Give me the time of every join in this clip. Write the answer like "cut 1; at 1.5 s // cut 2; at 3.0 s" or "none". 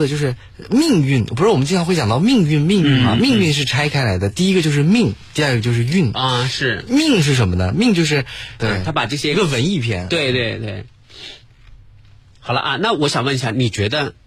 cut 1; at 8.6 s

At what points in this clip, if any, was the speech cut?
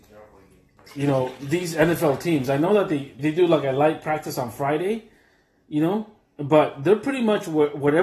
cut 1; at 3.2 s

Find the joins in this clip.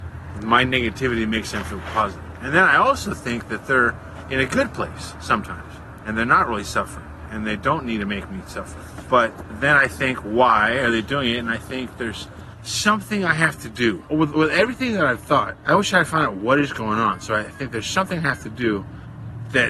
none

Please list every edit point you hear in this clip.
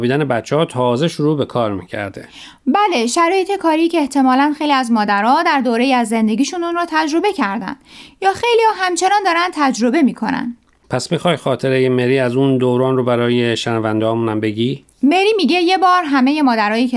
cut 1; at 14.9 s

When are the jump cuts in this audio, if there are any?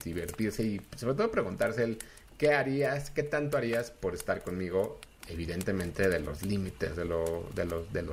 none

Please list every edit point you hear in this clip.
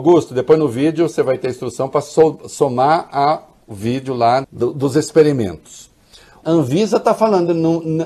cut 1; at 4.4 s // cut 2; at 6.4 s

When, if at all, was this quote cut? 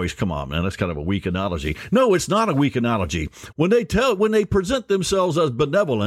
cut 1; at 3.5 s

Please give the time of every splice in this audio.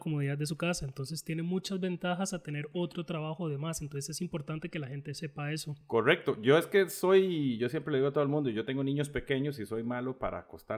none

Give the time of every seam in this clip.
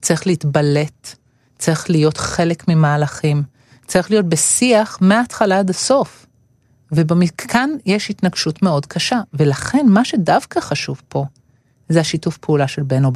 none

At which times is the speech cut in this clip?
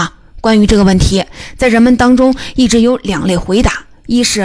none

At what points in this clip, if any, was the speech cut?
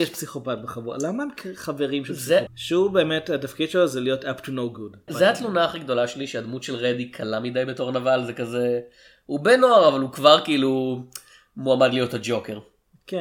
cut 1; at 2.5 s // cut 2; at 5.1 s

